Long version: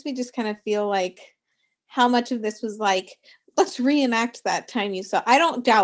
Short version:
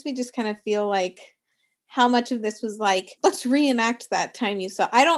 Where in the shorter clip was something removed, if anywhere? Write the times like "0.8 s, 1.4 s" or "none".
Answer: 3.2 s

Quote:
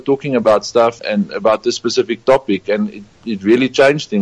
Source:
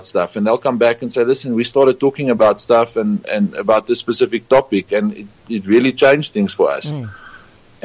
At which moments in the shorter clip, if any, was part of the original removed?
1.0 s

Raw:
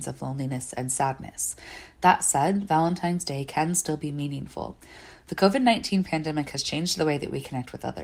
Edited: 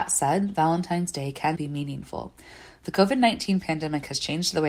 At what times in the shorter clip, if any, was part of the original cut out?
1.5 s

